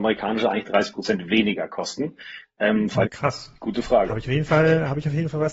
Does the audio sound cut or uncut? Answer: cut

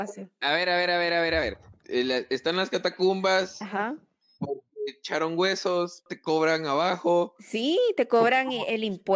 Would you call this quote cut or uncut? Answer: cut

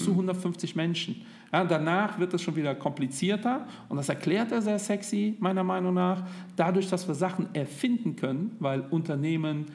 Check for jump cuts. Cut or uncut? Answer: uncut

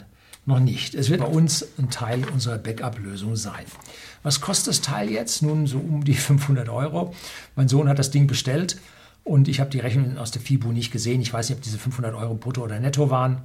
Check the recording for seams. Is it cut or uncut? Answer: cut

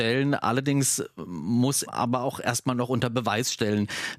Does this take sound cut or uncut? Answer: cut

